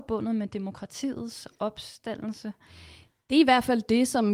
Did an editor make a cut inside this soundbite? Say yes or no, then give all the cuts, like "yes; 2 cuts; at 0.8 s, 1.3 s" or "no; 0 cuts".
no; 0 cuts